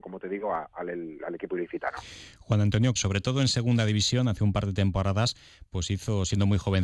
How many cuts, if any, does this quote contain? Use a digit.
1